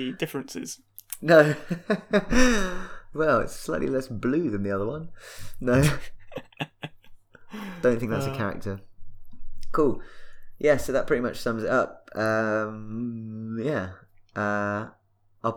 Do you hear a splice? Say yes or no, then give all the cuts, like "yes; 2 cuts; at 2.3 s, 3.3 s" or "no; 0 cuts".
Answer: no; 0 cuts